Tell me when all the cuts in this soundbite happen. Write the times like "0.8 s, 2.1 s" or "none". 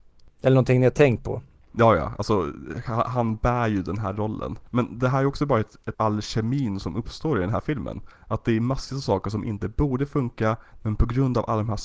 5.9 s, 10.8 s